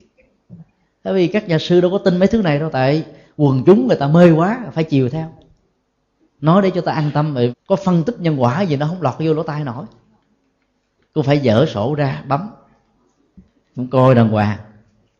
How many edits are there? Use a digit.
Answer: 1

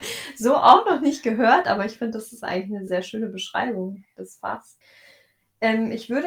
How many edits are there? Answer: 1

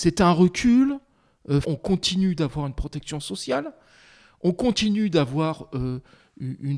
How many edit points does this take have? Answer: 1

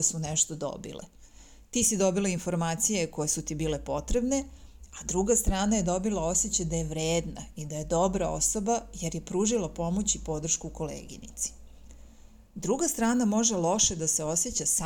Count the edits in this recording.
0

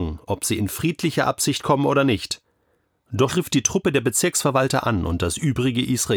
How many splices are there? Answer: 1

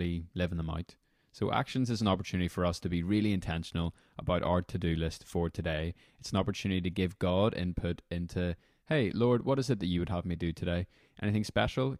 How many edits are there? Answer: 0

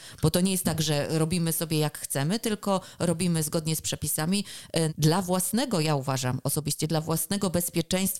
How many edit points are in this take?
1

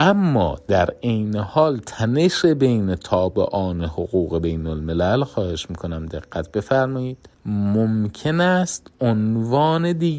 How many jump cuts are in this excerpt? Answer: 1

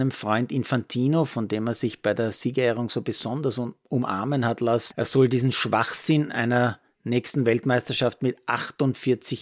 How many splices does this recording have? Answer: 1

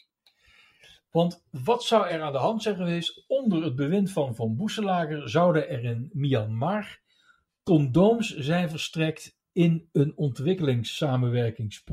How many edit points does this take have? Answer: 0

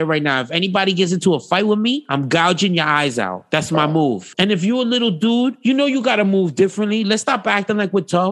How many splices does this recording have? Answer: 1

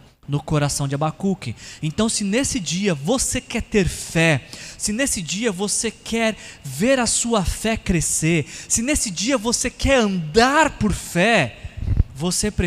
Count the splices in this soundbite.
0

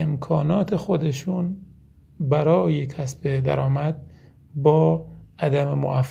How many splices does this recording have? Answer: 0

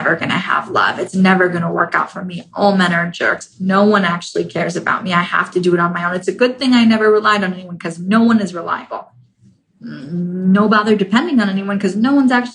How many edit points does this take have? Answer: 0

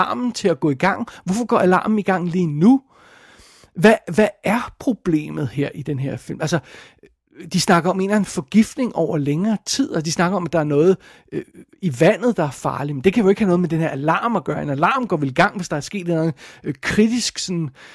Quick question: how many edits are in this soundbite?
0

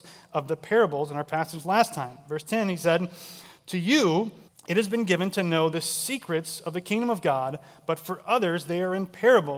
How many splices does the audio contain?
1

